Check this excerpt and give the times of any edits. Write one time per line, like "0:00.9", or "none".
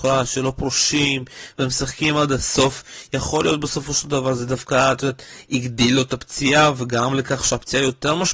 none